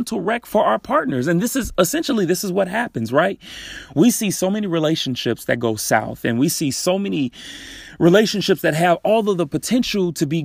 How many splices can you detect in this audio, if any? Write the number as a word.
zero